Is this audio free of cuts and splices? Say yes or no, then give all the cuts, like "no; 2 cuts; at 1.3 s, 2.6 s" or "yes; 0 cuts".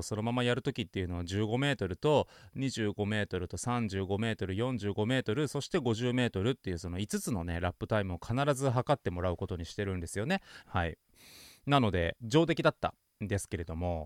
no; 2 cuts; at 10.6 s, 12.2 s